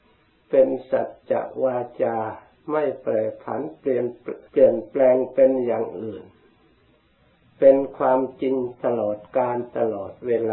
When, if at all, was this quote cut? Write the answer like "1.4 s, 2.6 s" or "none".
4.5 s